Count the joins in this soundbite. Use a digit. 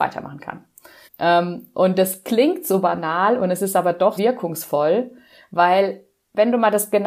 2